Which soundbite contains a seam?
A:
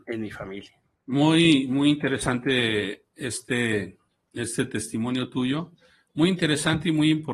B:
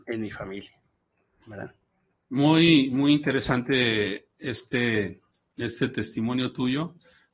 A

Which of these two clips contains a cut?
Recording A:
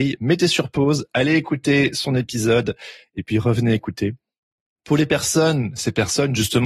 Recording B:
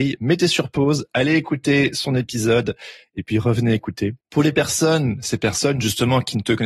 B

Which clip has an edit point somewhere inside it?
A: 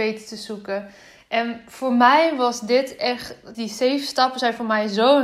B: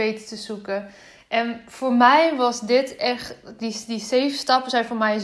A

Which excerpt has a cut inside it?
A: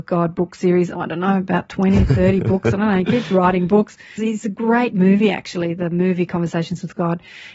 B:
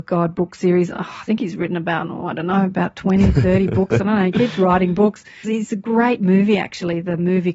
A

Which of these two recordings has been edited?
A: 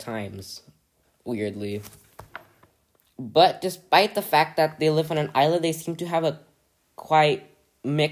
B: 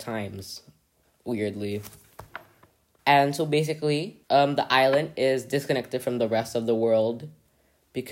B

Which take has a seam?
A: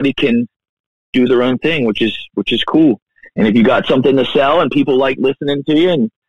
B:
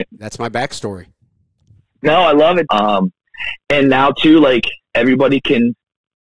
B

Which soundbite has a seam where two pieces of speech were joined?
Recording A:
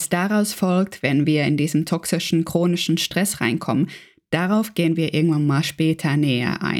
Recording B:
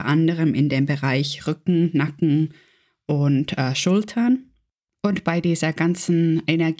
A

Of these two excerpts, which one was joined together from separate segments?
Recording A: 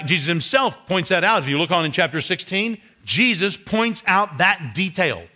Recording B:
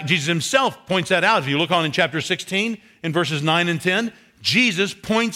A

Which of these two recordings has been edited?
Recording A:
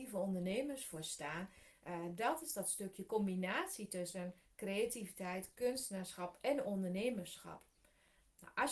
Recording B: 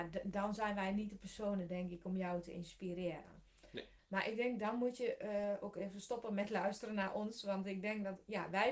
B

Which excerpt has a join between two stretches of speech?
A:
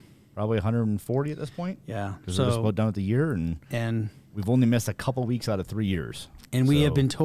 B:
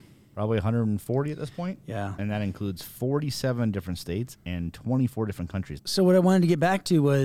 B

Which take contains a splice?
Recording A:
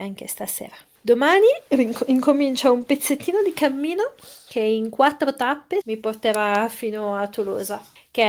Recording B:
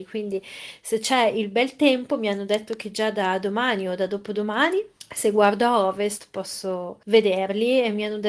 A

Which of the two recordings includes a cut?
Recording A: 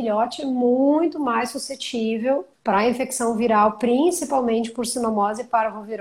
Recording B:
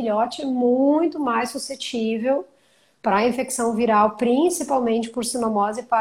A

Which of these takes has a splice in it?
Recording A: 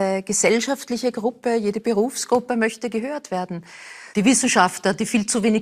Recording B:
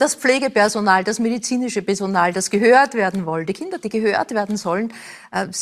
A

